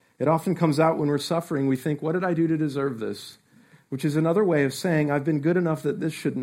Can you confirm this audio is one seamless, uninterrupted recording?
yes; 0 cuts

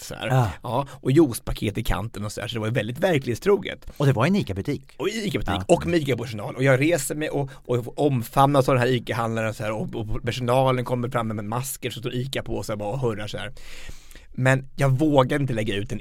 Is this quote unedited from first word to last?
yes; 0 cuts

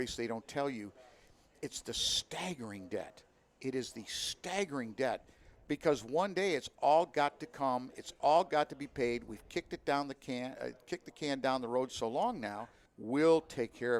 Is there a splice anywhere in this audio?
yes; 1 cut; at 12.9 s

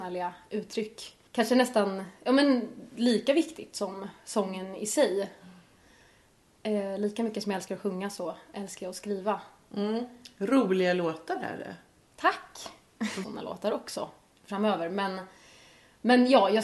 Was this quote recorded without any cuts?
no; 2 cuts; at 1.3 s, 13.2 s

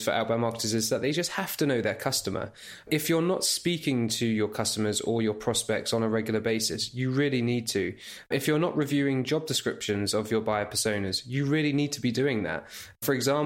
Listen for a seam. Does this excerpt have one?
no; 0 cuts

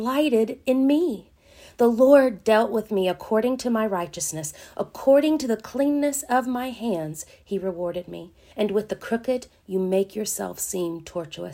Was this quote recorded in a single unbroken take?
no; 1 cut; at 8.5 s

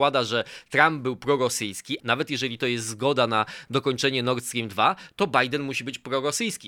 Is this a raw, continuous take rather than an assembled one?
no; 1 cut; at 2.0 s

